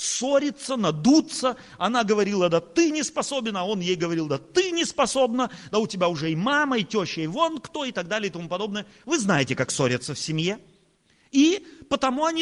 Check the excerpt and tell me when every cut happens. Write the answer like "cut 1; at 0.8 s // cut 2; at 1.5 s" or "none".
none